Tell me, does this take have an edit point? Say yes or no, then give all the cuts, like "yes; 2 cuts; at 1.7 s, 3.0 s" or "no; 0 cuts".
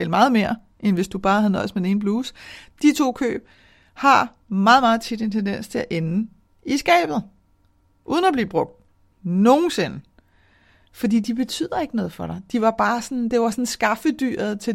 no; 0 cuts